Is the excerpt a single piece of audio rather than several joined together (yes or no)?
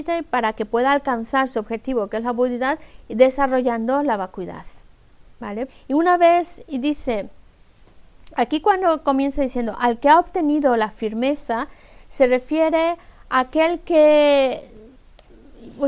no